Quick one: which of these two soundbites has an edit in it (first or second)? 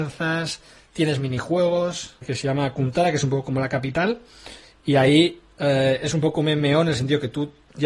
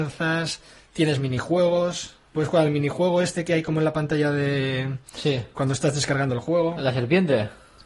first